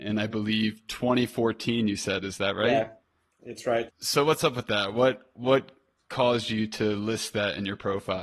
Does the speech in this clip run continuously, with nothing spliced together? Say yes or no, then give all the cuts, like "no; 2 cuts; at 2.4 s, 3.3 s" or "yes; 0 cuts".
no; 1 cut; at 3.9 s